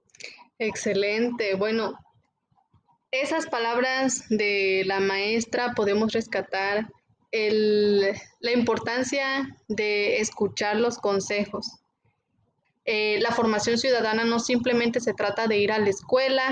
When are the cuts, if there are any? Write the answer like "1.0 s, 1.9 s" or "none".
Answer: 12.6 s